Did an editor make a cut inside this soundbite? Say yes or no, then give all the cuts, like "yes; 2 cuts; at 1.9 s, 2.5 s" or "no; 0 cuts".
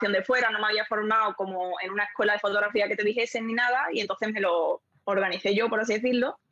no; 0 cuts